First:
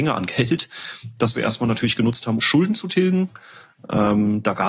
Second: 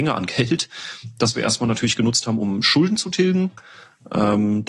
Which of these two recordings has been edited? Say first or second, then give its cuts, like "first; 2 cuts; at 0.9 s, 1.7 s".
first; 1 cut; at 2.4 s